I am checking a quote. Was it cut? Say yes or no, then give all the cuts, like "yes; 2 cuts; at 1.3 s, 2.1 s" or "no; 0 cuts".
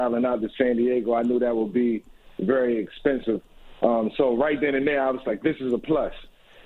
no; 0 cuts